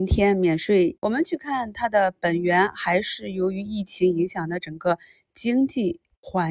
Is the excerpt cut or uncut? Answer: cut